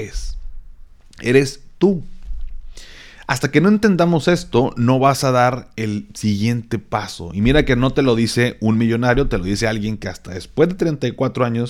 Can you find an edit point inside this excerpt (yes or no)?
no